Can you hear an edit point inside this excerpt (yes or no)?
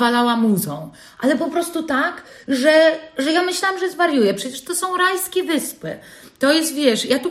no